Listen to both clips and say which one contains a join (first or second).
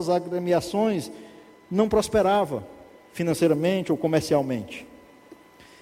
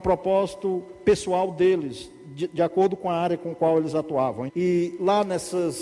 second